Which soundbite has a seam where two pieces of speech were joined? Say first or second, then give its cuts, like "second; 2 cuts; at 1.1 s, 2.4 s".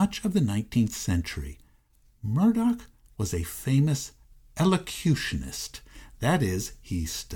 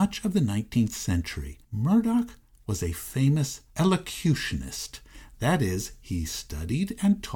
second; 2 cuts; at 1.6 s, 3.7 s